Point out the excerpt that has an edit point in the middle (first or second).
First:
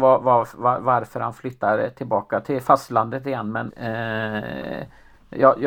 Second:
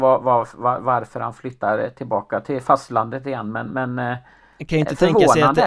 first